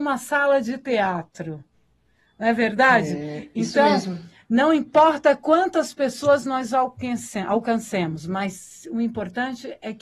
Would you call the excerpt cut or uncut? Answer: uncut